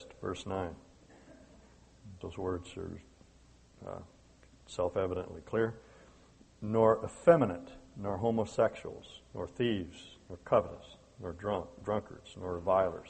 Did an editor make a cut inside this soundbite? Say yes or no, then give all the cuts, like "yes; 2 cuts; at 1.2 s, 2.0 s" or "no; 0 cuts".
yes; 1 cut; at 2.2 s